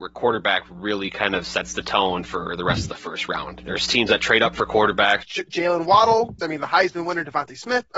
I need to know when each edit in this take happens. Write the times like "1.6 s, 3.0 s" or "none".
3.6 s, 5.2 s, 6.4 s